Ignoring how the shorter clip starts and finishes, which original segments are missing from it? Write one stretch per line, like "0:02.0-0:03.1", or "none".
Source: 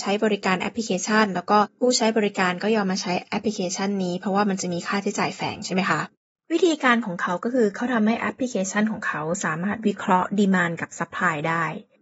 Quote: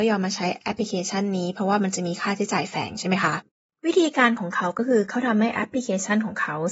none